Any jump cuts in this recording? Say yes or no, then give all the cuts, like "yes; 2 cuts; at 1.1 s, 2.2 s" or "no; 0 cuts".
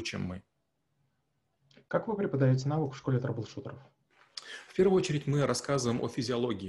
no; 0 cuts